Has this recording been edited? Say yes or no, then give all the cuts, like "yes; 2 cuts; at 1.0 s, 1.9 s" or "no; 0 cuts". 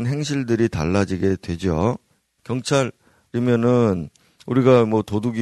yes; 1 cut; at 2.4 s